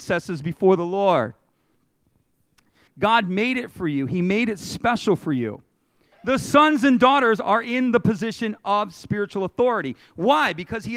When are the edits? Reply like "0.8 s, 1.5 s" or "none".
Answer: 2.9 s, 6.1 s